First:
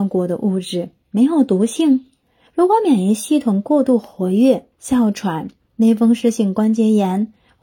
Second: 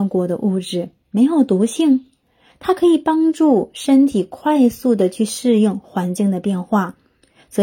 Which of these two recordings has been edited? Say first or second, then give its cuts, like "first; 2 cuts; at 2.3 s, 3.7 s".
first; 2 cuts; at 2.5 s, 4.7 s